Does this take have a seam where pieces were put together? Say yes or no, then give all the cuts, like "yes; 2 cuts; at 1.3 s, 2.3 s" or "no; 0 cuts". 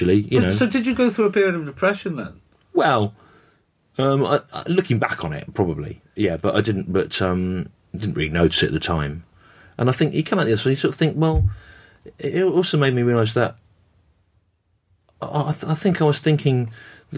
no; 0 cuts